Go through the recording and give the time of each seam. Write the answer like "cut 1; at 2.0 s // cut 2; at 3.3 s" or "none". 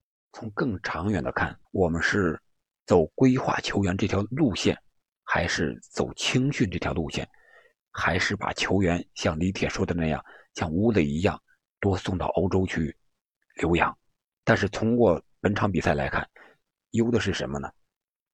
cut 1; at 1.6 s // cut 2; at 14.4 s // cut 3; at 16.8 s